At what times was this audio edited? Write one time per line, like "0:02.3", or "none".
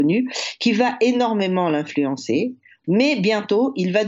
0:02.8